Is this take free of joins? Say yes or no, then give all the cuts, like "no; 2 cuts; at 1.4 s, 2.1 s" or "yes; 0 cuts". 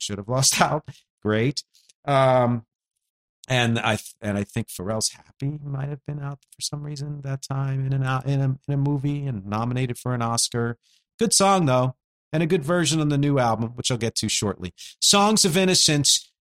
yes; 0 cuts